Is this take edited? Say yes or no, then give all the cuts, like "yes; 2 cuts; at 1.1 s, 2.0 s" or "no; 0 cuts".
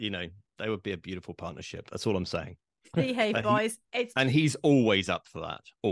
no; 0 cuts